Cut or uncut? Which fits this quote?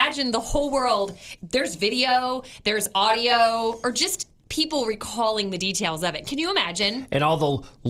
uncut